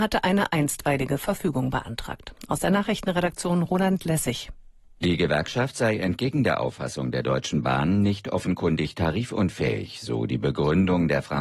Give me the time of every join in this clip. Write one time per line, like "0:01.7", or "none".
none

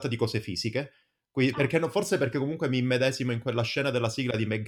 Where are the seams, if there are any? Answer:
none

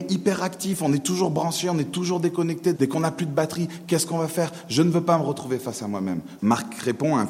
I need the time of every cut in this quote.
0:02.7
0:06.4

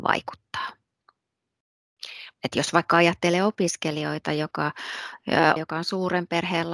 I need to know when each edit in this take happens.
0:02.3
0:05.6

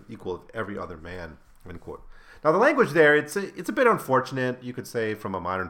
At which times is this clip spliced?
none

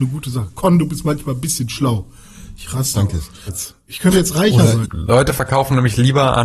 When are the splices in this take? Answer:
0:03.5
0:04.8

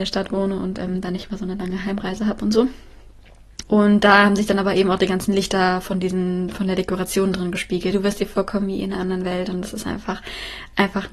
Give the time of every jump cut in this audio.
0:03.6
0:07.9

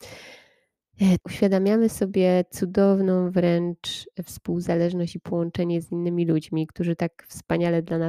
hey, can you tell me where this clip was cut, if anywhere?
0:01.2

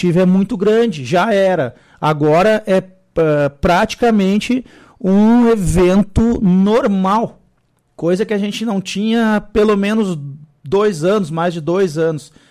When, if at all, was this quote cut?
none

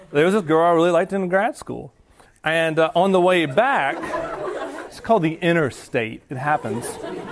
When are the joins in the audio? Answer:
0:02.3
0:04.9

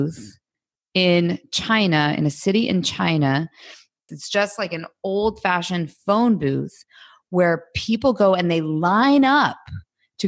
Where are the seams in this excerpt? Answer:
0:04.1

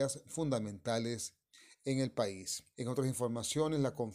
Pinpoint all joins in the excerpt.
0:02.7

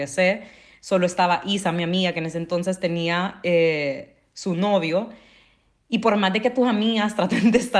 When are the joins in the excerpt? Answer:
none

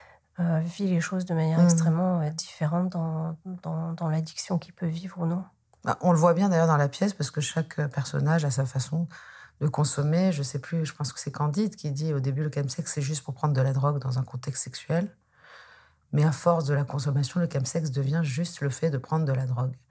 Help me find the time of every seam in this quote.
none

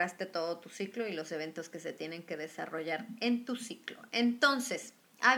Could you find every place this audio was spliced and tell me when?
none

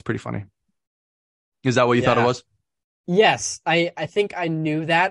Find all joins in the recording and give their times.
none

